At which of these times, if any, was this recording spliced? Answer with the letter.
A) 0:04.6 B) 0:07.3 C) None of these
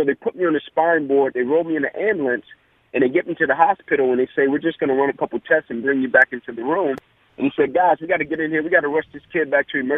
B